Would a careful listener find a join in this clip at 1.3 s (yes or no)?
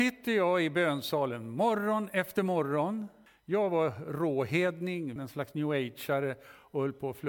no